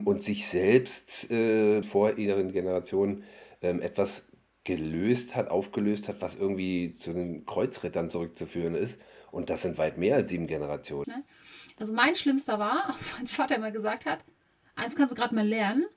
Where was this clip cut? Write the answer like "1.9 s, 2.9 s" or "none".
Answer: 1.8 s, 11.0 s

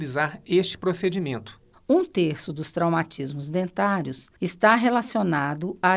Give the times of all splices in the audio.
1.7 s, 4.4 s

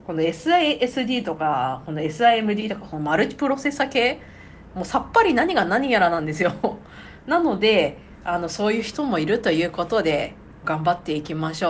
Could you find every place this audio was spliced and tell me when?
10.6 s

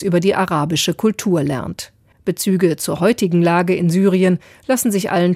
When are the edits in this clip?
2.1 s

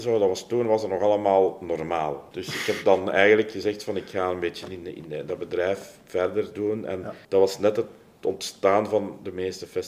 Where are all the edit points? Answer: 2.3 s, 7.2 s

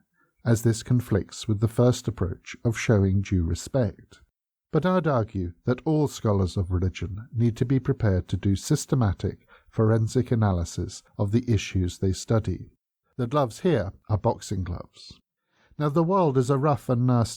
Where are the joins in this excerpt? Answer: 4.6 s, 13.0 s

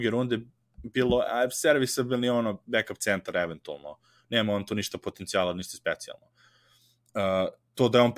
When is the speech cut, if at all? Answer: none

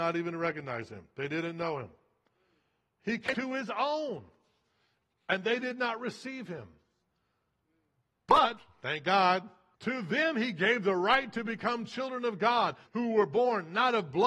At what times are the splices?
9.7 s, 12.8 s

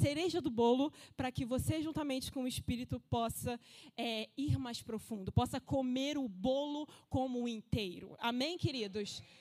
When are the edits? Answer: none

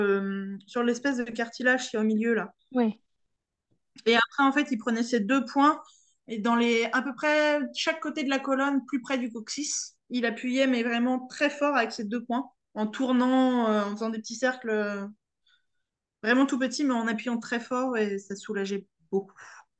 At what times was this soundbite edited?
2.6 s

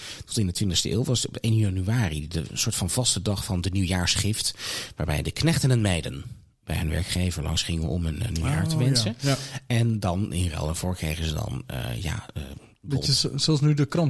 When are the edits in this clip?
none

